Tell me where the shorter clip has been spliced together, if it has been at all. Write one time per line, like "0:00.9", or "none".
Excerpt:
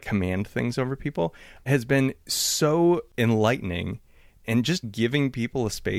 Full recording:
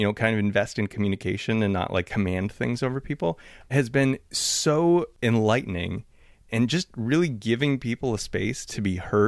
0:04.8

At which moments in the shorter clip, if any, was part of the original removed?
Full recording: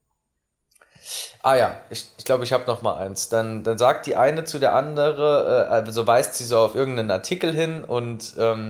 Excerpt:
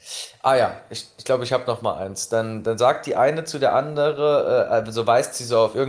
none

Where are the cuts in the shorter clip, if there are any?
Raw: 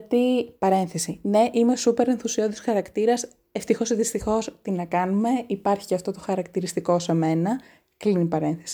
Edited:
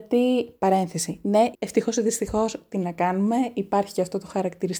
0:01.5

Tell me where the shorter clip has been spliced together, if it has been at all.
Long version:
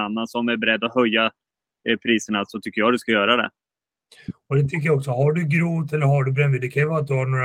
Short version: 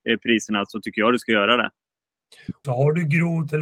0:02.6

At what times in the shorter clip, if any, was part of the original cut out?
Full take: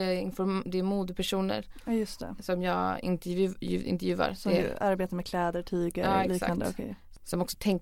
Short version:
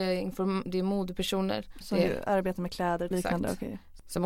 0:01.8
0:03.1

